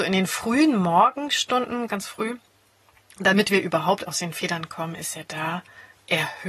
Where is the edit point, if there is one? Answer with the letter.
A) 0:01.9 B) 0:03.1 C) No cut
A